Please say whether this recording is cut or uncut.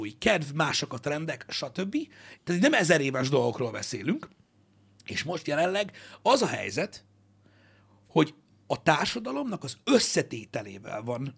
cut